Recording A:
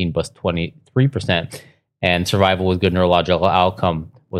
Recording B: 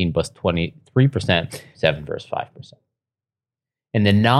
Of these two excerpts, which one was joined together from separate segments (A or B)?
B